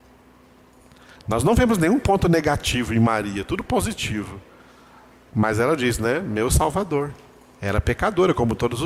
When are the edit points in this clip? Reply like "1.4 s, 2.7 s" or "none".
none